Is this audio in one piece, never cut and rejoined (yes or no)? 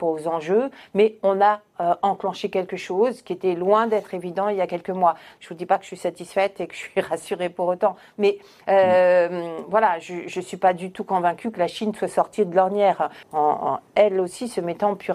no